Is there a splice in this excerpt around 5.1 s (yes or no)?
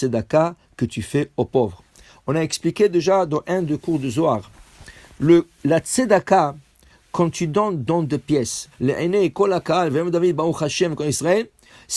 no